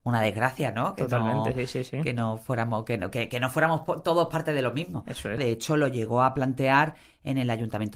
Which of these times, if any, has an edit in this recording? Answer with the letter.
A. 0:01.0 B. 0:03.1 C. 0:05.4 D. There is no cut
C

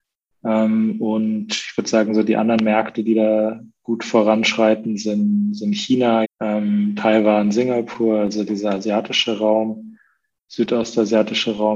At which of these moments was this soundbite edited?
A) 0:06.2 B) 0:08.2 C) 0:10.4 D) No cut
A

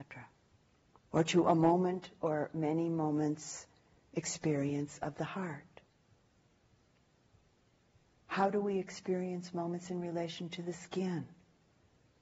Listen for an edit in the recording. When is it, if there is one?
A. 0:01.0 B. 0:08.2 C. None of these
A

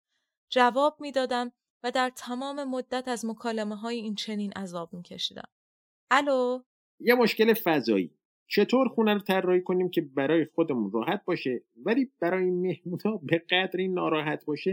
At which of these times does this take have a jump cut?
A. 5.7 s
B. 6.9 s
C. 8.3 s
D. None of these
D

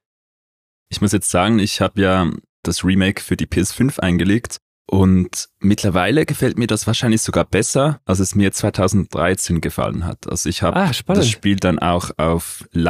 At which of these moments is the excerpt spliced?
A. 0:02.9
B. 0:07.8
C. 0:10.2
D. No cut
D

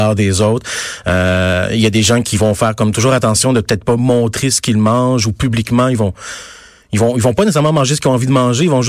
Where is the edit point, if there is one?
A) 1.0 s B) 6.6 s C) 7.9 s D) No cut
D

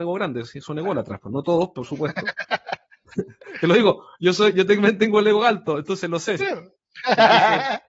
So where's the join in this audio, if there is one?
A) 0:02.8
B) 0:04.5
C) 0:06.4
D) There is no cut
C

